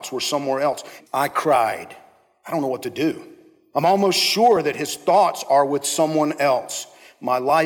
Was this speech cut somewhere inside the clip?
yes; 1 cut; at 1.0 s

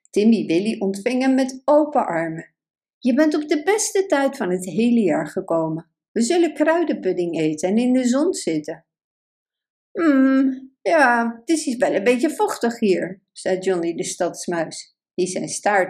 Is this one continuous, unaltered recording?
yes; 0 cuts

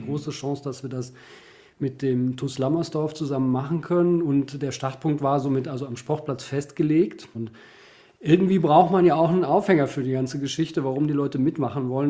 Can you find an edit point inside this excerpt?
yes; 1 cut; at 7.3 s

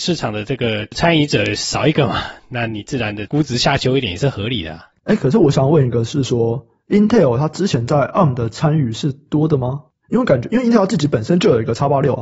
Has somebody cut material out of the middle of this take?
yes; 1 cut; at 4.9 s

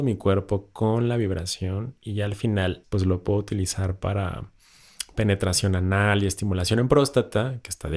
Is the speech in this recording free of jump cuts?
no; 1 cut; at 2.8 s

